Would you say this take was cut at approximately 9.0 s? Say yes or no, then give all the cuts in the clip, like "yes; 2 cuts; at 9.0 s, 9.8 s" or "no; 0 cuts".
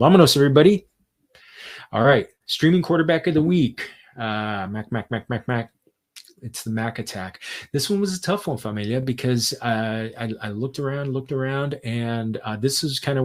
no; 0 cuts